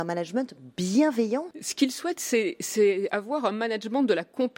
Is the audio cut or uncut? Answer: cut